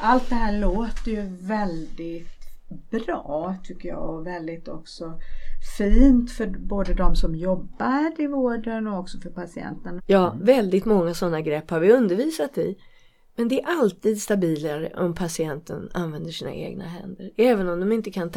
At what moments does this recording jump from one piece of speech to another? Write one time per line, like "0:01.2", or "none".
0:10.0